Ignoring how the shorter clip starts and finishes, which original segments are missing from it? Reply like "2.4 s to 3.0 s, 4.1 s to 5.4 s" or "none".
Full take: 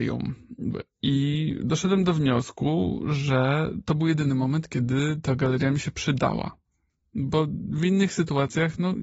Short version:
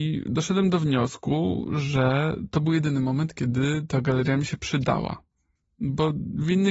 none